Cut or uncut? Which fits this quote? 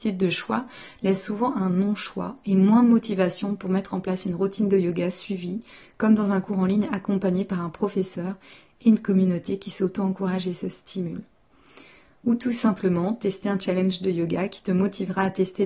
uncut